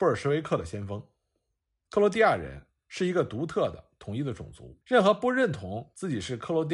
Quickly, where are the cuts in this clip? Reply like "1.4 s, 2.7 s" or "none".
1.9 s, 4.8 s